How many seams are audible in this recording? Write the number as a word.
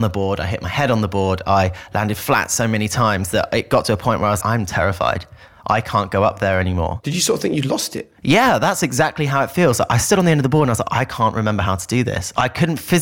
one